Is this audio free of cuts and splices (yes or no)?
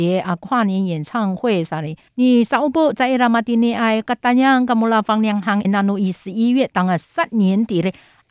no